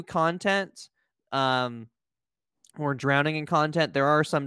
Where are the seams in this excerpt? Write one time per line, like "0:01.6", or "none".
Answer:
none